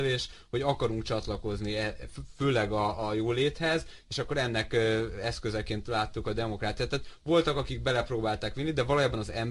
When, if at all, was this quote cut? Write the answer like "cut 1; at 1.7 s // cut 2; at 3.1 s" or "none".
none